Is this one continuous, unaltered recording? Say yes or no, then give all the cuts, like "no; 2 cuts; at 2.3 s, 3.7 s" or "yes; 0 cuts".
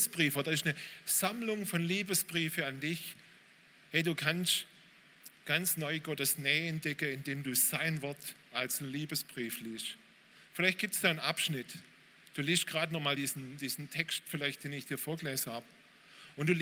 yes; 0 cuts